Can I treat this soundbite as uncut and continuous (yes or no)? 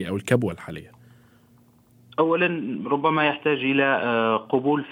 yes